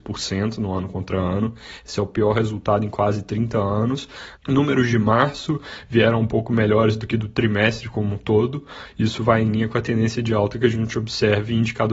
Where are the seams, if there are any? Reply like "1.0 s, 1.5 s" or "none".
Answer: 4.3 s